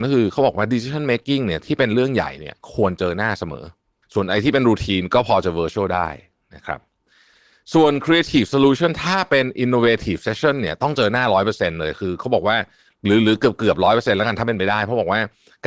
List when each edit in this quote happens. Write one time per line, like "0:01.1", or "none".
none